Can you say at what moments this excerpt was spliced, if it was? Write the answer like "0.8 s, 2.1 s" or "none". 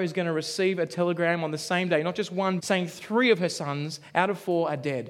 2.6 s